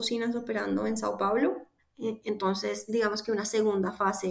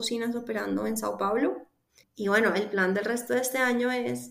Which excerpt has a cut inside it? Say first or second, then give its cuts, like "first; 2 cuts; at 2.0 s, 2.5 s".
first; 2 cuts; at 1.8 s, 2.9 s